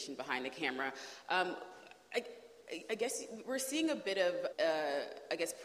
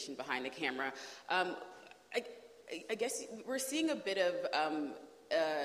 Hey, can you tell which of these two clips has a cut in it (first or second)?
first